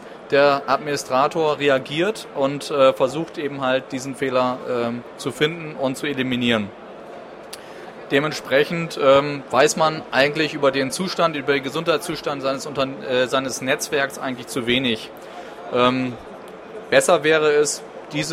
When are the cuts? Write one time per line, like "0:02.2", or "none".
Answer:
none